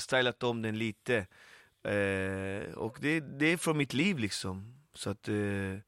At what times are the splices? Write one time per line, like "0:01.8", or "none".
none